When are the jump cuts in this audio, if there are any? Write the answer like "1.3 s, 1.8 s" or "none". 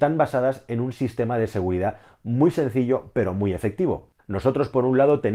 4.2 s